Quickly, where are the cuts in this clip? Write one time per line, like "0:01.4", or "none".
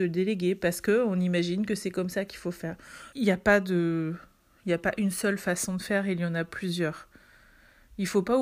0:03.1